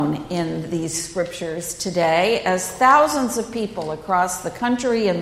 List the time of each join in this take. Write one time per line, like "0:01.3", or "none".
none